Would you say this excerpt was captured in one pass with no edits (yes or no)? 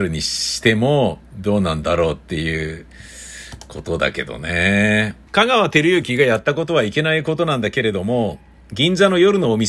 no